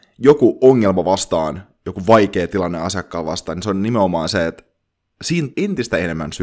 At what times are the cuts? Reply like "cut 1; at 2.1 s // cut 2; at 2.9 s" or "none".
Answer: cut 1; at 5.5 s

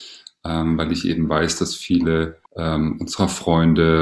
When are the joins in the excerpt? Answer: cut 1; at 2.5 s

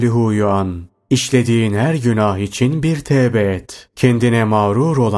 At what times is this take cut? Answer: cut 1; at 3.9 s

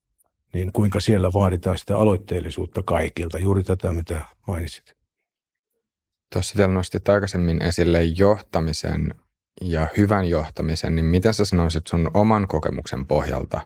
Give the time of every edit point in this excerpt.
none

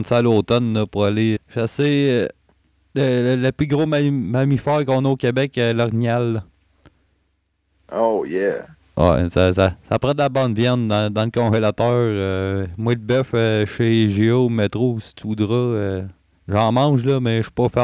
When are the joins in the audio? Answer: cut 1; at 1.4 s

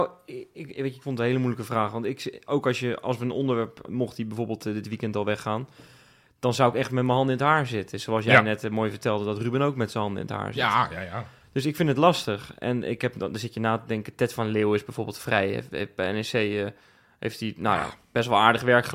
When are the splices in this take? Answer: cut 1; at 3.9 s

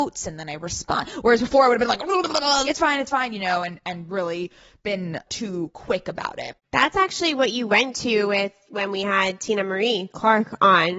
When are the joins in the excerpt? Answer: cut 1; at 2.6 s

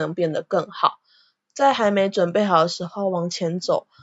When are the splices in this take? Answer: none

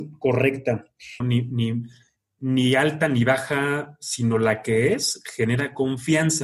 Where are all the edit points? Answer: cut 1; at 1.2 s

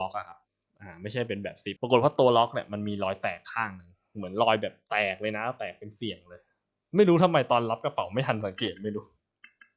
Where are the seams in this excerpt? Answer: cut 1; at 1.8 s

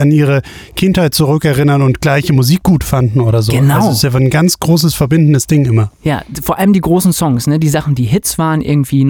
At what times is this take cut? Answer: none

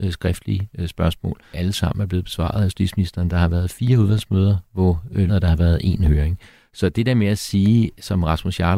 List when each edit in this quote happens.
cut 1; at 1.5 s // cut 2; at 5.3 s

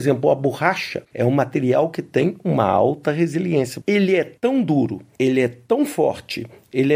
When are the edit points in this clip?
cut 1; at 3.8 s

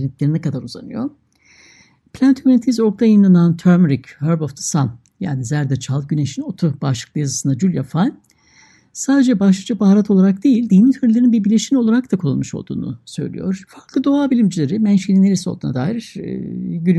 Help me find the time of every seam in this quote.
cut 1; at 13.7 s

